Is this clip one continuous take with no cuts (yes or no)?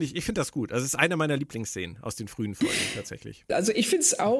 no